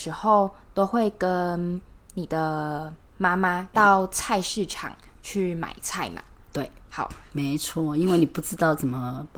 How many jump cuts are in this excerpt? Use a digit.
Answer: 2